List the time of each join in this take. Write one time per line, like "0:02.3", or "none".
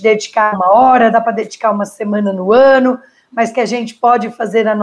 0:01.1